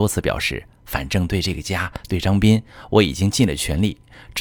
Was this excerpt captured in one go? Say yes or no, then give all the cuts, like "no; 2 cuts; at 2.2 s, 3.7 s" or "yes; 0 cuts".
yes; 0 cuts